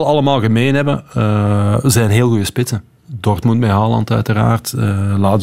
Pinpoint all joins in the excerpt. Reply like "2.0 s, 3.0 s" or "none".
none